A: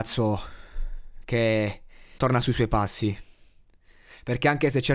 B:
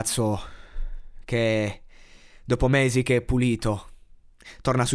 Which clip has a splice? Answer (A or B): A